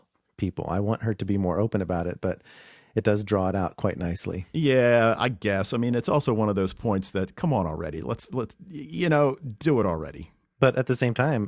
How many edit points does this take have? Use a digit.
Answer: 0